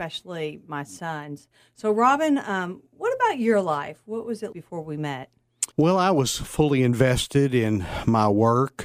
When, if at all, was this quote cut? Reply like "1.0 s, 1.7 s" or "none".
4.5 s, 5.7 s